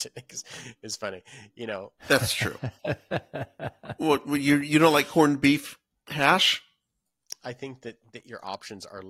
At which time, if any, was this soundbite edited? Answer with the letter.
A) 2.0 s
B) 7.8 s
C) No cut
A